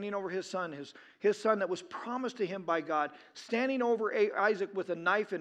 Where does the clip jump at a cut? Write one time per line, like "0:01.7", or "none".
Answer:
none